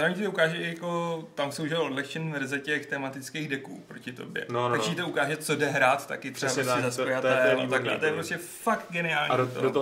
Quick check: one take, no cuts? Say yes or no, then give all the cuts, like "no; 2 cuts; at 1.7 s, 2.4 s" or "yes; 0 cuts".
yes; 0 cuts